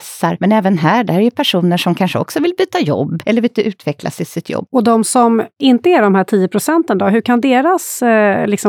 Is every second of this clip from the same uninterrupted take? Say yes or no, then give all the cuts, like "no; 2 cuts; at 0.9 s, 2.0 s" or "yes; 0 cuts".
no; 1 cut; at 4.7 s